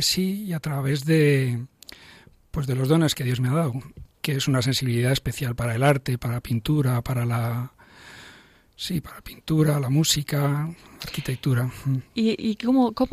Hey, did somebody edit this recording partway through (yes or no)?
no